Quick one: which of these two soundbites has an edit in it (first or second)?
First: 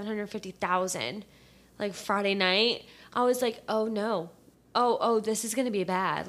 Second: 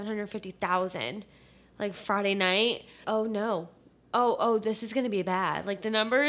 second